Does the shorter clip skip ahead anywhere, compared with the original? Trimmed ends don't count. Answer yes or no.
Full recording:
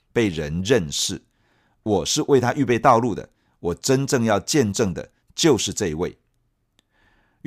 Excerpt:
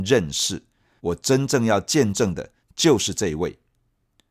yes